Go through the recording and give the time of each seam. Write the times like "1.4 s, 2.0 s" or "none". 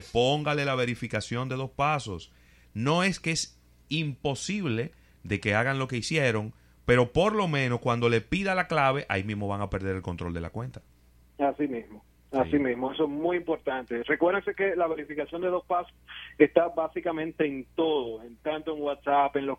none